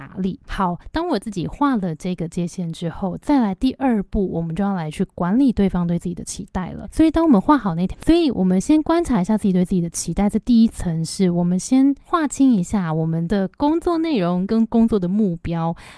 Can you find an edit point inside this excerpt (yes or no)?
yes